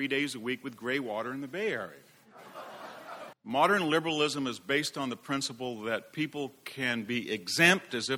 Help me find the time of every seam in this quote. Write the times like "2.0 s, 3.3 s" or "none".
3.3 s